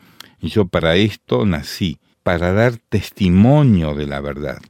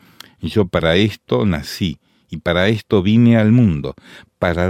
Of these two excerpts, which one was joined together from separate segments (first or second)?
first